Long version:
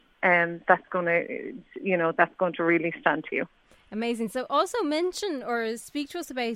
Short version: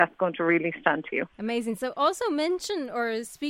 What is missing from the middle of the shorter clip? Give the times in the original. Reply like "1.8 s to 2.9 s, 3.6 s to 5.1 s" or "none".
3.5 s to 3.9 s